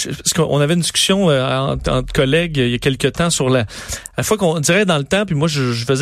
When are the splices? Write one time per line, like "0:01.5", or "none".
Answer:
none